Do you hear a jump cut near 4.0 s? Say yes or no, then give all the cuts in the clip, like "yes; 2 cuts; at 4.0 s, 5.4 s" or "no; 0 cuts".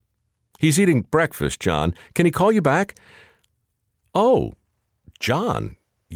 yes; 1 cut; at 4.0 s